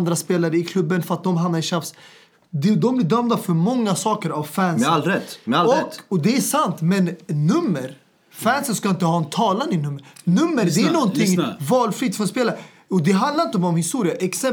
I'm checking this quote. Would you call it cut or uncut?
uncut